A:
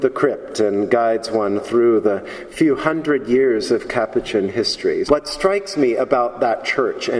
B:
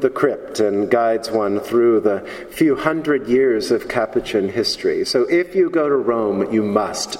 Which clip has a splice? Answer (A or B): A